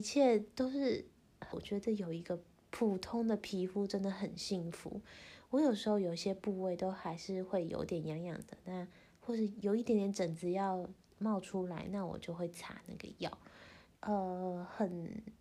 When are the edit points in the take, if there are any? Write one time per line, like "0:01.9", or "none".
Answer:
0:01.5
0:13.9